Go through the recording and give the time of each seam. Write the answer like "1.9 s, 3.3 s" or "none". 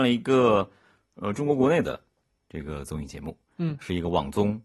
none